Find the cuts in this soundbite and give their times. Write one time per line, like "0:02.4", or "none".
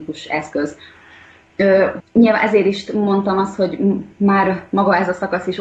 0:02.0